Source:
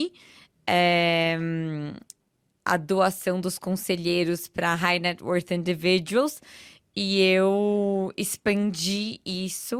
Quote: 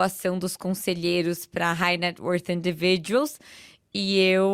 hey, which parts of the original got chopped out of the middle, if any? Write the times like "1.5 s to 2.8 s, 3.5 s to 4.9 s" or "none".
none